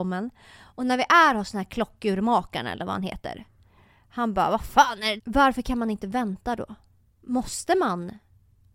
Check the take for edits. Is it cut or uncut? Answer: cut